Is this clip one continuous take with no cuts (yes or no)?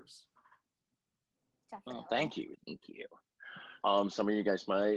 no